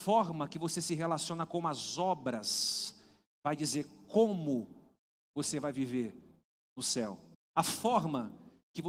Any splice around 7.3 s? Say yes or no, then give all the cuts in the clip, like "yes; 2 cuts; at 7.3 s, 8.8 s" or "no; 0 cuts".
yes; 1 cut; at 7.3 s